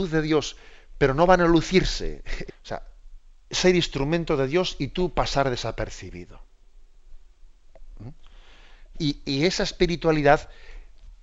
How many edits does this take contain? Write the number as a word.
two